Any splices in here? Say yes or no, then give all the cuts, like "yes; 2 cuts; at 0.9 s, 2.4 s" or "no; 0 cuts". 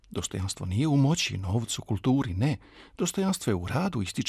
no; 0 cuts